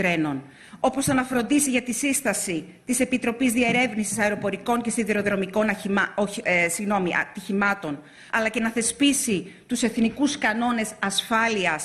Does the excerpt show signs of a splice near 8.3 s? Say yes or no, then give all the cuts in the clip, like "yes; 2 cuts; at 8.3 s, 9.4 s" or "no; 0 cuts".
yes; 1 cut; at 8.3 s